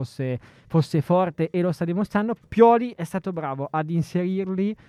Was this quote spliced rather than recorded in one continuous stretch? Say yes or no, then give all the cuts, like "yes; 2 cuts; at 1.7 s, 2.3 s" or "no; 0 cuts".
yes; 1 cut; at 2.4 s